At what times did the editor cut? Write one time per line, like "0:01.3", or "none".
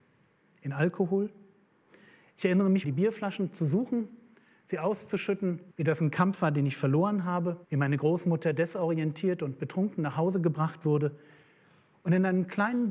0:02.8
0:05.7
0:07.6

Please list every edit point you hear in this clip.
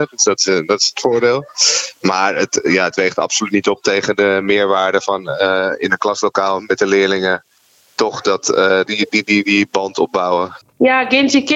0:08.9
0:10.6

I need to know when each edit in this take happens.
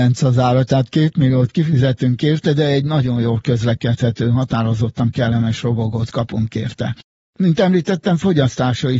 none

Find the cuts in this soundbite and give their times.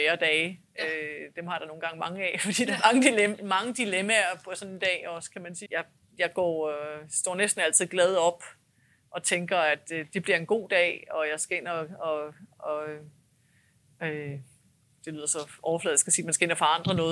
0:05.7

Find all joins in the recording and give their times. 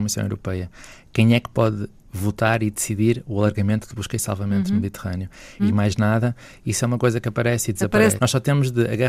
0:05.6
0:08.2

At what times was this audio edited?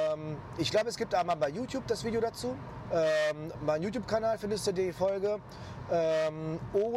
0:02.9

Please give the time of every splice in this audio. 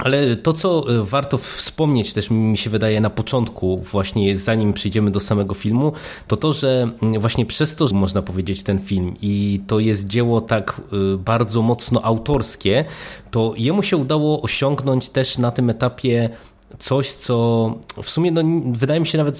0:07.9

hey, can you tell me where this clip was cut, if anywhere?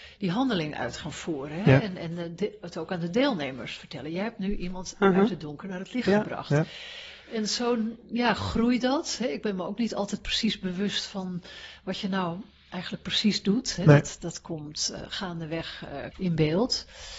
0:14.2
0:16.1

